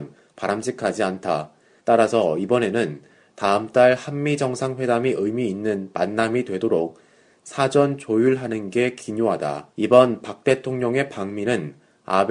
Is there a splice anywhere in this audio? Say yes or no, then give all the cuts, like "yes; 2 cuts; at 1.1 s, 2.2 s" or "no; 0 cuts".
yes; 2 cuts; at 1.8 s, 9.7 s